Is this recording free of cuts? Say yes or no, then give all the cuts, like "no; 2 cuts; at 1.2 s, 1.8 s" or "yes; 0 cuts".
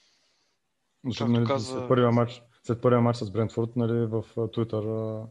yes; 0 cuts